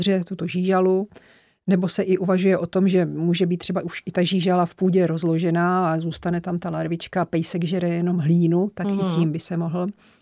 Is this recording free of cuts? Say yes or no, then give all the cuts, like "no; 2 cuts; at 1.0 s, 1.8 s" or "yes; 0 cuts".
yes; 0 cuts